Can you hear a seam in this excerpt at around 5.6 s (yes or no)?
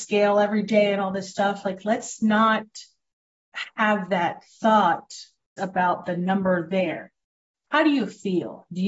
yes